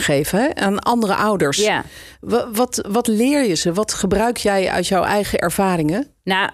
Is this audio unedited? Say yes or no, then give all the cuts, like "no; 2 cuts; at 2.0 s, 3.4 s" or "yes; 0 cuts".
yes; 0 cuts